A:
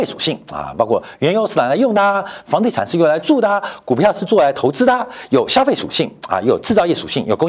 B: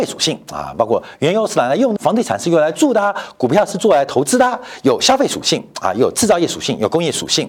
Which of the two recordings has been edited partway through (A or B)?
B